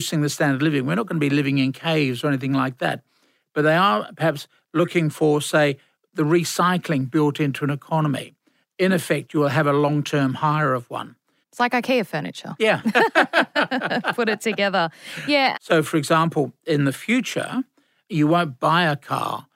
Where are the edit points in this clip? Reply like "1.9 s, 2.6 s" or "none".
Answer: 8.6 s, 11.4 s, 15.5 s